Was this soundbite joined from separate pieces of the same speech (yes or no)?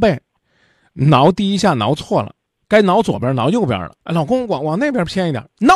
yes